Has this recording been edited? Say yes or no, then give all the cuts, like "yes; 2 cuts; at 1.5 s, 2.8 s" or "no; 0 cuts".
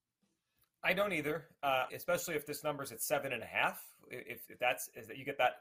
yes; 1 cut; at 1.9 s